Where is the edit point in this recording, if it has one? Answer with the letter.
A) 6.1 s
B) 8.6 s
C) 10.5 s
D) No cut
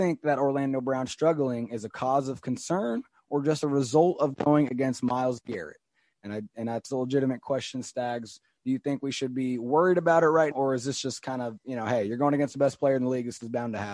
C